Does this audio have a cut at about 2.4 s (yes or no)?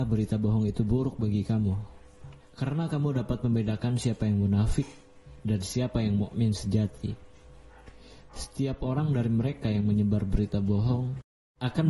yes